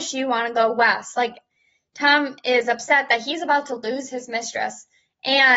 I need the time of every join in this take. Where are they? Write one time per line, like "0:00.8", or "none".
none